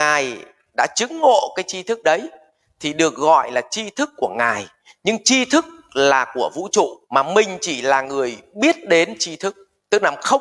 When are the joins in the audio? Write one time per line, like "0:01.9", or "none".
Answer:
0:07.0